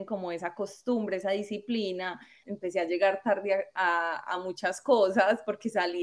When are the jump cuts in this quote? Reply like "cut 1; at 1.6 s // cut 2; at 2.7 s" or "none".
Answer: cut 1; at 2.4 s